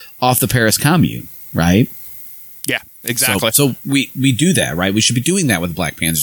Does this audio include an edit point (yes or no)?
no